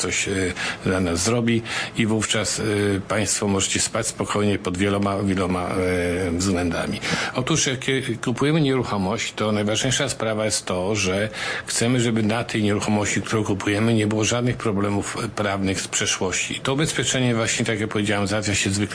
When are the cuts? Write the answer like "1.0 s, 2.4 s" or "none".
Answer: 16.6 s